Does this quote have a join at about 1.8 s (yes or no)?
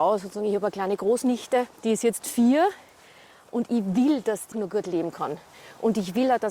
yes